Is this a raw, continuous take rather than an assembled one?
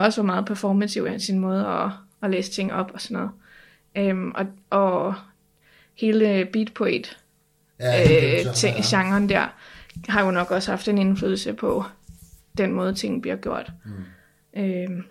yes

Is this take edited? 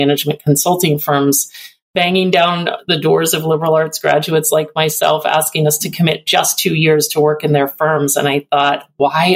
no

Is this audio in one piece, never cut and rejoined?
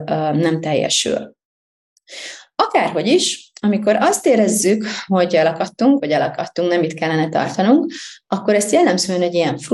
no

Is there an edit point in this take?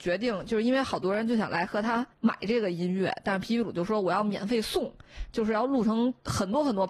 yes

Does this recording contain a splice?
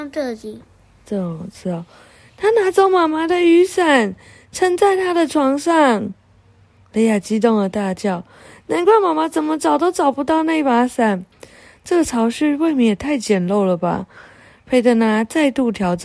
no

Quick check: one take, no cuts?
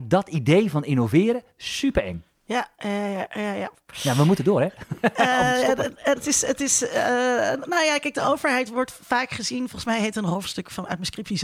yes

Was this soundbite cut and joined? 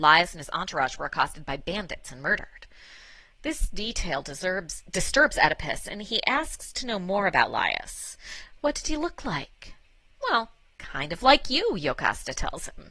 no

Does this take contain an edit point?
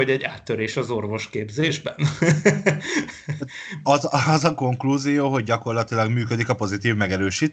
no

